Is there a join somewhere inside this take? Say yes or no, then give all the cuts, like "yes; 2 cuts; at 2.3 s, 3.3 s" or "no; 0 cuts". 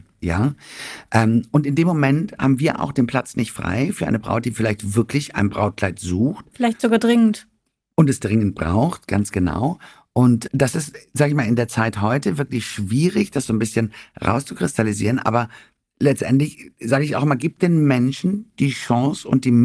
yes; 1 cut; at 10.5 s